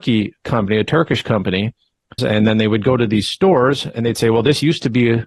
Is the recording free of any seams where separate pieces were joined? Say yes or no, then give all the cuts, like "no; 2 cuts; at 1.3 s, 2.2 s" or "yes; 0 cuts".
no; 1 cut; at 2.2 s